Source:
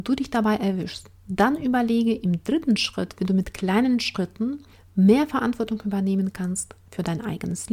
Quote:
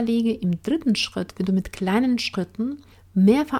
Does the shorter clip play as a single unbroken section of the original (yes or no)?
yes